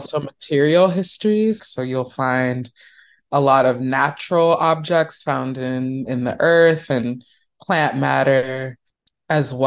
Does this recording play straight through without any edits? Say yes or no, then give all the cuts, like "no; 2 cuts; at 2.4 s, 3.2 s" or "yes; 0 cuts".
no; 2 cuts; at 1.6 s, 6.1 s